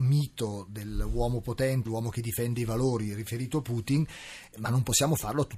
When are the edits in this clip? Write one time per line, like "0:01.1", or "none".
0:01.9